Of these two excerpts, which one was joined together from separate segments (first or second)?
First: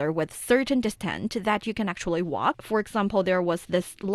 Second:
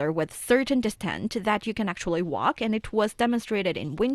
first